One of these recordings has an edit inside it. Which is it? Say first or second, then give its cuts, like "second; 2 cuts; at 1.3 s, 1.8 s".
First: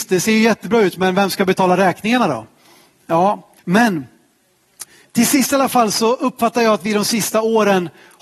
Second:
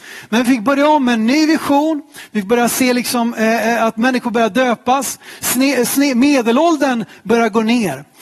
first; 2 cuts; at 3.6 s, 5.1 s